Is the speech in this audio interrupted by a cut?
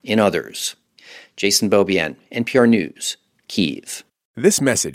no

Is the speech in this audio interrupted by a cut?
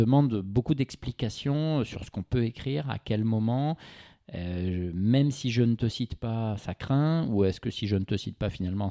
no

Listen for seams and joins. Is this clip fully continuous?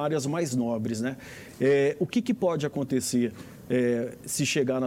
yes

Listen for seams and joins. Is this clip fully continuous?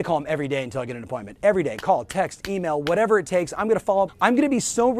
no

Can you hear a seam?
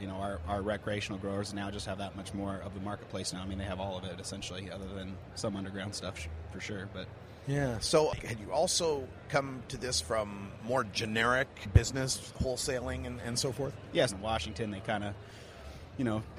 yes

